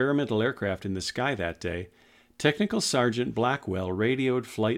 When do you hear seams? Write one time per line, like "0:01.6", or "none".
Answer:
none